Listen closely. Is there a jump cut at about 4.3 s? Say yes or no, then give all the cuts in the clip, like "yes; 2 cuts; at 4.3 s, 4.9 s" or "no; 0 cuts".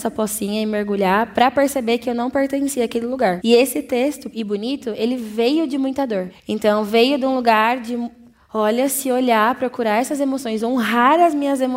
yes; 1 cut; at 4.3 s